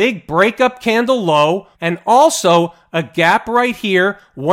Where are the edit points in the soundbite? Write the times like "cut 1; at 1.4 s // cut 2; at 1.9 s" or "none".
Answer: cut 1; at 1.7 s

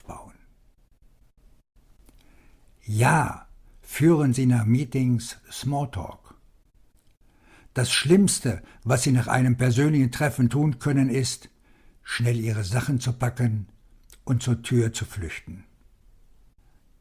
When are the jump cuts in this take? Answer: none

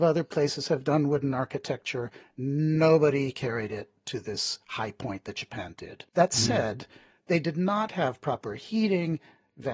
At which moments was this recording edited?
cut 1; at 6.1 s

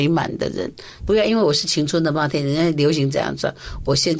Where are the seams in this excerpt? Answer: cut 1; at 1.0 s

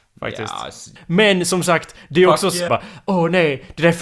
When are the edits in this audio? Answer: cut 1; at 1.0 s // cut 2; at 2.7 s

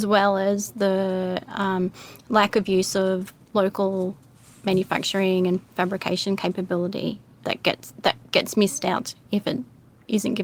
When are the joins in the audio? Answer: cut 1; at 7.4 s

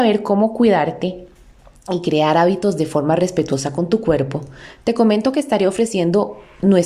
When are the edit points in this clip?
none

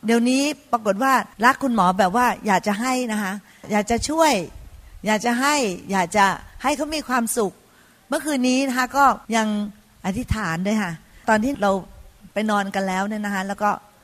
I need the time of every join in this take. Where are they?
cut 1; at 1.3 s // cut 2; at 9.2 s

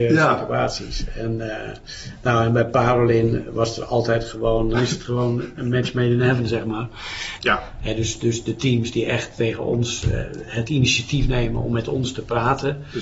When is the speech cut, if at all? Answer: cut 1; at 4.7 s // cut 2; at 7.4 s

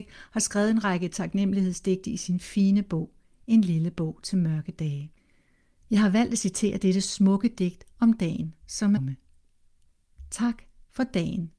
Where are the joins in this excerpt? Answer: cut 1; at 9.0 s

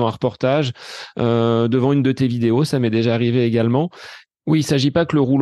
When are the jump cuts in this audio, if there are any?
cut 1; at 4.3 s

